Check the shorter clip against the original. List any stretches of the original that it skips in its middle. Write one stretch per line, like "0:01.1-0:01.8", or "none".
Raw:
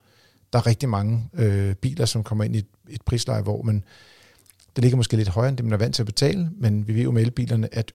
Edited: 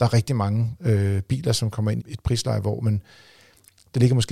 0:02.5-0:02.8